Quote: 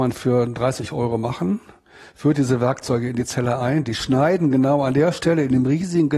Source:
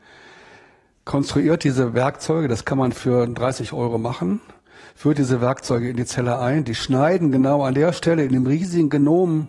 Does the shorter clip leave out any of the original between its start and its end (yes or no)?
no